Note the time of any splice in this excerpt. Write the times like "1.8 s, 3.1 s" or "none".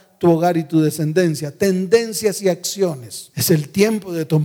3.3 s